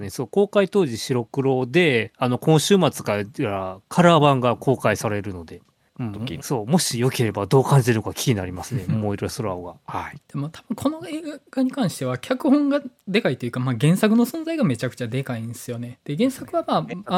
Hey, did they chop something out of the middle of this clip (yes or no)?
yes